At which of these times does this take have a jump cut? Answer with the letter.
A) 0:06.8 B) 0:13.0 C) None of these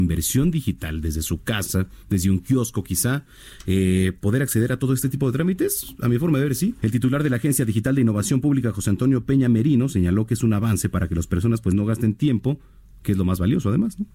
A